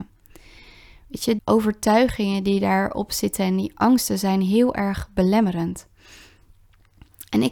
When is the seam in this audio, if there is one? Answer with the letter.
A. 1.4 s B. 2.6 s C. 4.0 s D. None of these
A